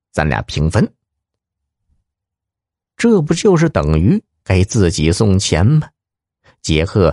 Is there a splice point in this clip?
no; 0 cuts

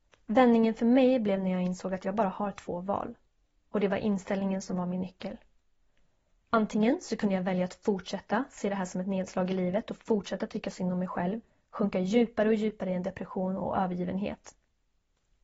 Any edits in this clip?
no; 0 cuts

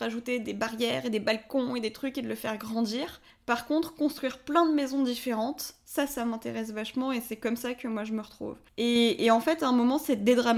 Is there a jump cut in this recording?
no; 0 cuts

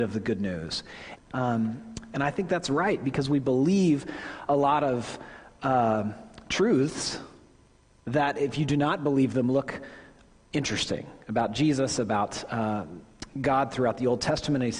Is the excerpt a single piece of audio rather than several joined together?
no; 1 cut; at 1.2 s

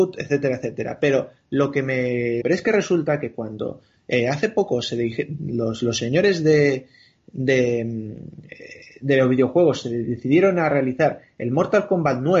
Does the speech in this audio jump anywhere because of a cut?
yes; 1 cut; at 2.4 s

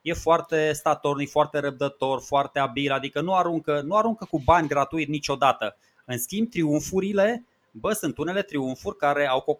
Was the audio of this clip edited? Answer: no; 0 cuts

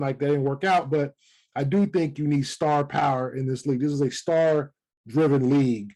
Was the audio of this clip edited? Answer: no; 0 cuts

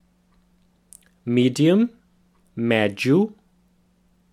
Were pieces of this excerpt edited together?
no; 0 cuts

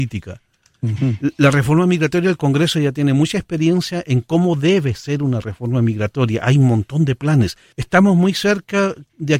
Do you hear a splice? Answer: yes; 1 cut; at 7.7 s

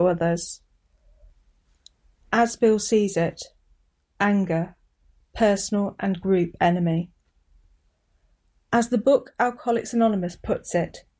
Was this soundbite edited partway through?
yes; 1 cut; at 4.0 s

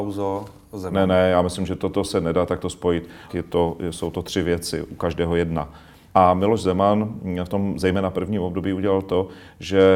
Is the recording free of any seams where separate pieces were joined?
no; 2 cuts; at 3.3 s, 6.1 s

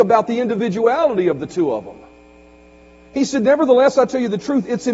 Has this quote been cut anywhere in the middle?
no; 0 cuts

